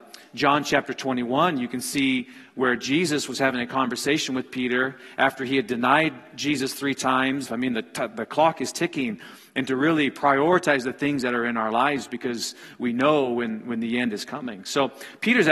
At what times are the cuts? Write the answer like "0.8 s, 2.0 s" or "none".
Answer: 7.5 s

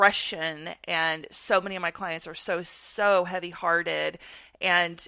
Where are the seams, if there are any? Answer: none

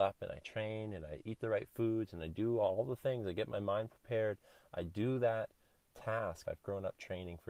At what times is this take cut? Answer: 6.4 s

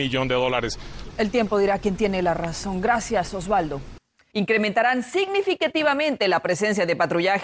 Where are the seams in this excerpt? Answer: 1.1 s, 4.3 s

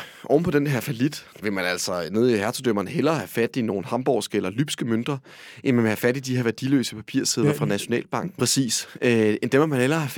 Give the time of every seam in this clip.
1.4 s, 8.4 s

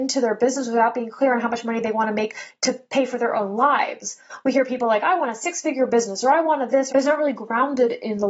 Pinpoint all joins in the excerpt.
6.9 s

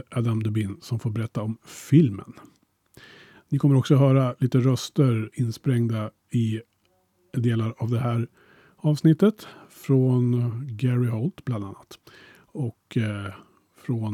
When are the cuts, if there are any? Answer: none

